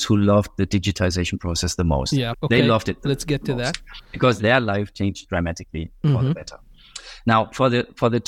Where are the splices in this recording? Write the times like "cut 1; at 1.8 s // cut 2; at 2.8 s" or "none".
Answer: cut 1; at 2.3 s